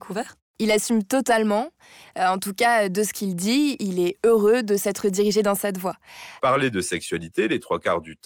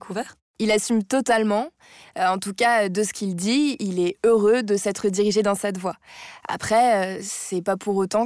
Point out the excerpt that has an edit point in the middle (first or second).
first